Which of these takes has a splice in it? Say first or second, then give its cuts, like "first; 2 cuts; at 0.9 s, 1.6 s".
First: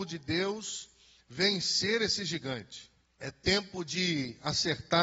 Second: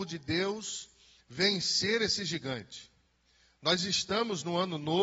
first; 1 cut; at 3.0 s